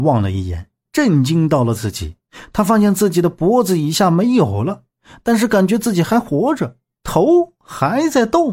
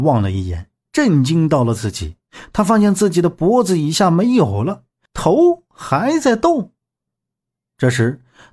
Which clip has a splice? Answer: second; 1 cut; at 5.1 s

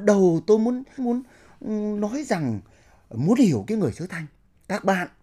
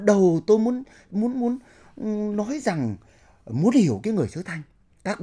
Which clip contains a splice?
first; 1 cut; at 1.0 s

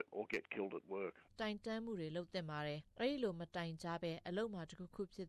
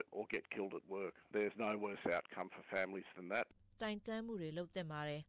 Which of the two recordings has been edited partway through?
first; 2 cuts; at 1.3 s, 2.9 s

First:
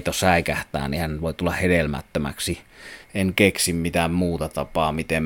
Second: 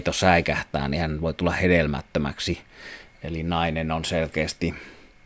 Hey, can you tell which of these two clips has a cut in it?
first; 1 cut; at 3.0 s

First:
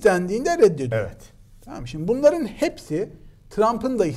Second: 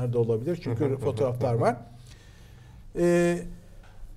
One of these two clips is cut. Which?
second; 1 cut; at 2.8 s

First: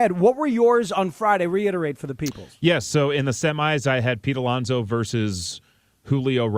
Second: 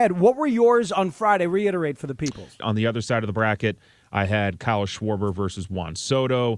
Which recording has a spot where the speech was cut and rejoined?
second; 1 cut; at 2.6 s

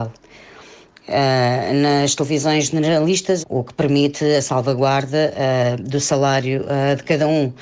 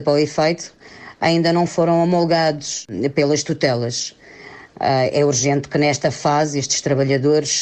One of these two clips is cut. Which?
first; 1 cut; at 3.4 s

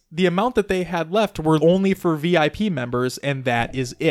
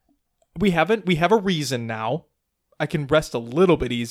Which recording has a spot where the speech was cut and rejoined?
first; 1 cut; at 1.6 s

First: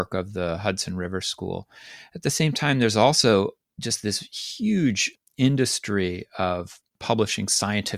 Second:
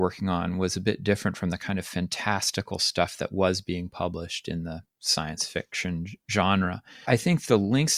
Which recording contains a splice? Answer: second; 1 cut; at 7.1 s

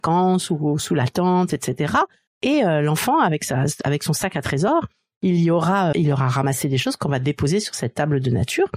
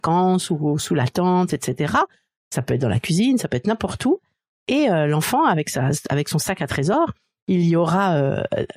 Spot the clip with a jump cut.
first; 2 cuts; at 2.3 s, 5.9 s

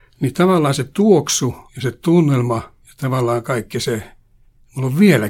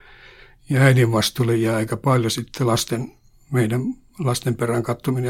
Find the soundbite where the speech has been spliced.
first; 2 cuts; at 1.7 s, 2.8 s

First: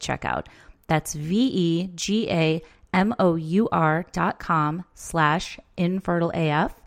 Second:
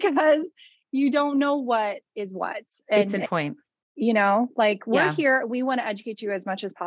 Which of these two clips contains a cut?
second; 1 cut; at 3.2 s

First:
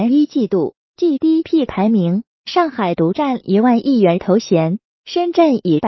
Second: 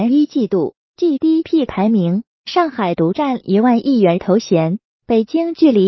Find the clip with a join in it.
first; 1 cut; at 4.9 s

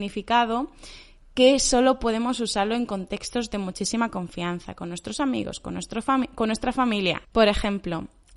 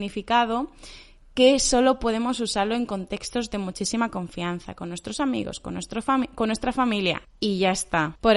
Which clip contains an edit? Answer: first; 1 cut; at 7.3 s

